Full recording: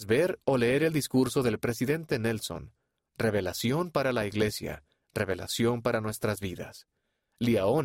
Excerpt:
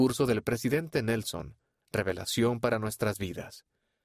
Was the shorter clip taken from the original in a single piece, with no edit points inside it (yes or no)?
no